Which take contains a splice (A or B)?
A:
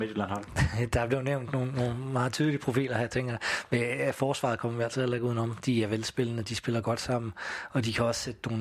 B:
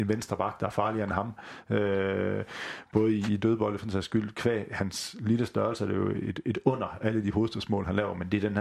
B